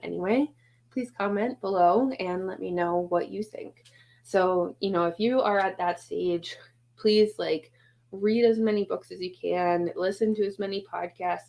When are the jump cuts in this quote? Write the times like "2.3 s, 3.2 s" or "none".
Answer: none